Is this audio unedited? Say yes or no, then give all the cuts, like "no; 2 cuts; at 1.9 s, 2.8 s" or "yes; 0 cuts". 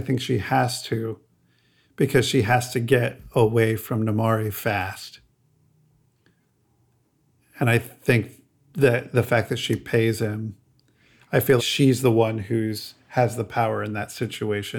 no; 1 cut; at 11.6 s